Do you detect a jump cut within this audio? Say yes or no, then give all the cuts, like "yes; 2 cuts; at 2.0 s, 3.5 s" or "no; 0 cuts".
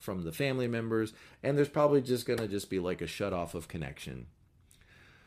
no; 0 cuts